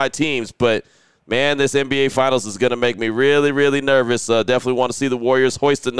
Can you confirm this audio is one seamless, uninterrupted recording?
yes; 0 cuts

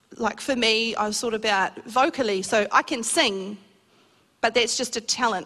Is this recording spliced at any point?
no; 0 cuts

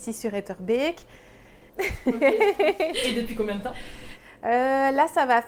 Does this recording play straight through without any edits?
no; 1 cut; at 1.7 s

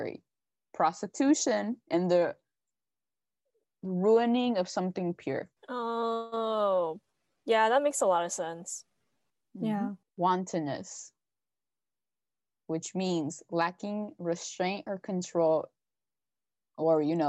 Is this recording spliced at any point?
yes; 2 cuts; at 5.6 s, 10.0 s

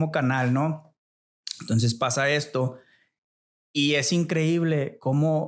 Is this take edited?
no; 0 cuts

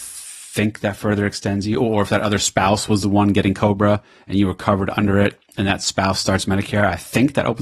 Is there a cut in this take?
no; 0 cuts

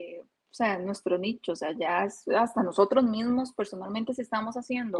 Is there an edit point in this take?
no; 0 cuts

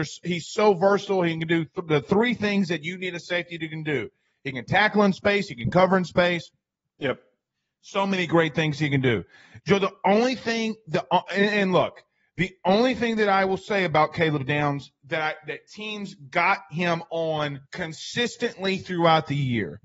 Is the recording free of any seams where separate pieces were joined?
no; 1 cut; at 17.7 s

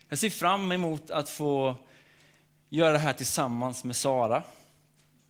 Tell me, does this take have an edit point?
no; 0 cuts

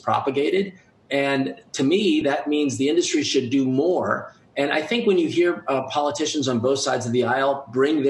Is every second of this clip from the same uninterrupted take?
yes; 0 cuts

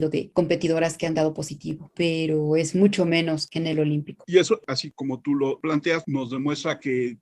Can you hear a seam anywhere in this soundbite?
no; 0 cuts

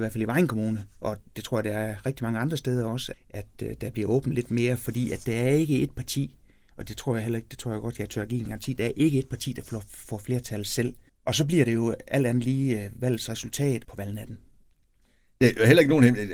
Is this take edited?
yes; 3 cuts; at 3.1 s, 11.1 s, 13.8 s

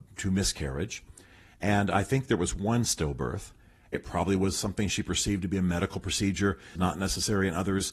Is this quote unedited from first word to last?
no; 2 cuts; at 3.9 s, 6.8 s

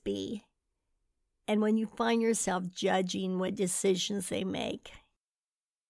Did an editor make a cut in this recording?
no; 0 cuts

